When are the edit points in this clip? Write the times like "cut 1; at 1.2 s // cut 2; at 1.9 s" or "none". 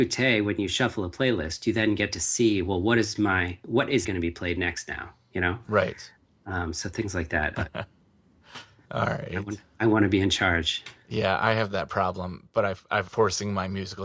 cut 1; at 4.0 s // cut 2; at 7.5 s // cut 3; at 13.1 s